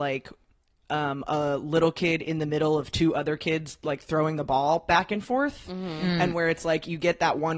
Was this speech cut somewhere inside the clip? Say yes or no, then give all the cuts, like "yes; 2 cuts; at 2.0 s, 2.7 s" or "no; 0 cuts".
no; 0 cuts